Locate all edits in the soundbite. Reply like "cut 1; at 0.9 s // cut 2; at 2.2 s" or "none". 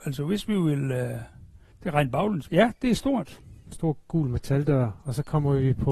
cut 1; at 2.5 s // cut 2; at 3.7 s

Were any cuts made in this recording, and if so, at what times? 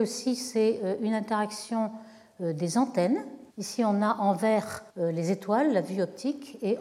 cut 1; at 3.5 s // cut 2; at 4.9 s

